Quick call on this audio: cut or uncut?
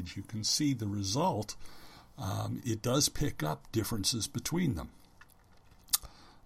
cut